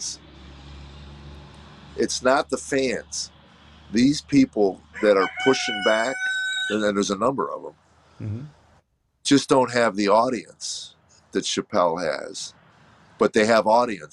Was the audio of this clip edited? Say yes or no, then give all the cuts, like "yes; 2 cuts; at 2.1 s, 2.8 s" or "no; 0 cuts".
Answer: no; 0 cuts